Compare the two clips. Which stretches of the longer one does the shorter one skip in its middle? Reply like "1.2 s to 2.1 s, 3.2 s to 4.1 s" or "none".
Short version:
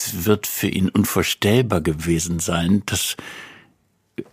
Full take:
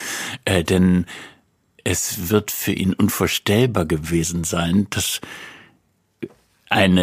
none